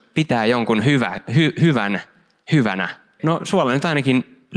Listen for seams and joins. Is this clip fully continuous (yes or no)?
no